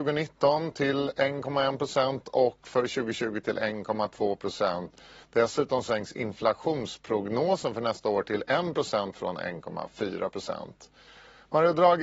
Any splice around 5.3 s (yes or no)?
no